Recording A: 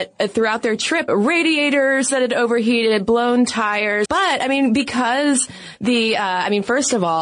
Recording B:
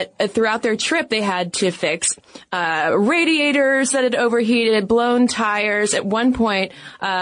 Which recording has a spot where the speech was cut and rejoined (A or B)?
A